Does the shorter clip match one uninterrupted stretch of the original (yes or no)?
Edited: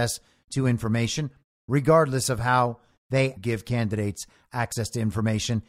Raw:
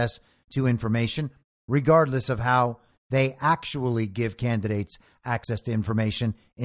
no